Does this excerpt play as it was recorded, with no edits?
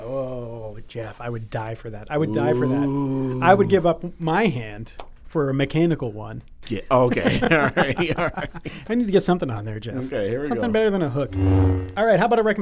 yes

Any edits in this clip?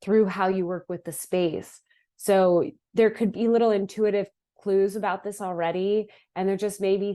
no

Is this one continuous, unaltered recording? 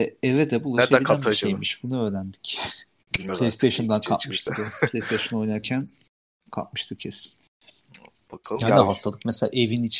yes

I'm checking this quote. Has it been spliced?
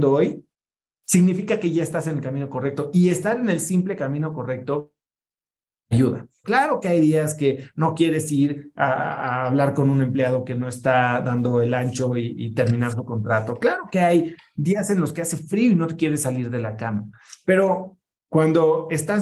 yes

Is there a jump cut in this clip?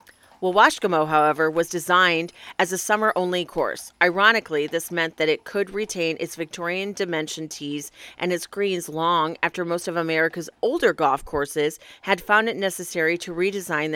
no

